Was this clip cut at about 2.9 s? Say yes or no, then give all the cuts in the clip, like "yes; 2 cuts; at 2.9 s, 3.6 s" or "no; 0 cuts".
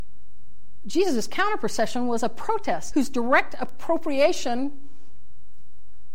yes; 1 cut; at 2.9 s